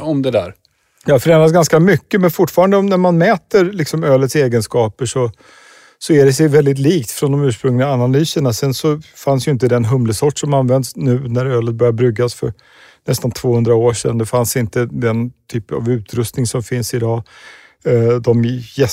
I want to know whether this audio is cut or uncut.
uncut